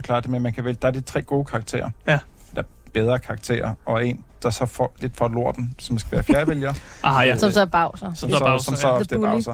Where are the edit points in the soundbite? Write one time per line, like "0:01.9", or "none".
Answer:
none